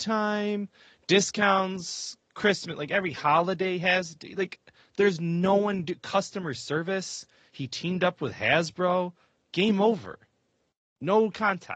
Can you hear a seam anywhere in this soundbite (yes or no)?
no